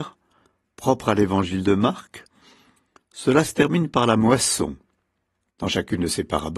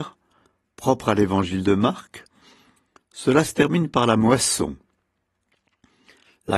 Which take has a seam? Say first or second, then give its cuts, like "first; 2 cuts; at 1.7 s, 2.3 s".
first; 1 cut; at 5.5 s